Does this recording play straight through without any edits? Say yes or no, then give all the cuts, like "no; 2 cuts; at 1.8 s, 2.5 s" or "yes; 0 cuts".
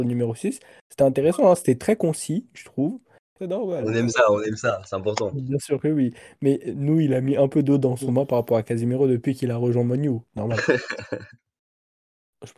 no; 2 cuts; at 3.4 s, 10.3 s